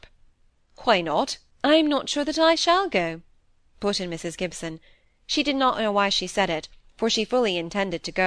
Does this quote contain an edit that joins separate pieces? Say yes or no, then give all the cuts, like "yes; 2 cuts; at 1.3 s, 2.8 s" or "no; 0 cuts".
yes; 1 cut; at 1.5 s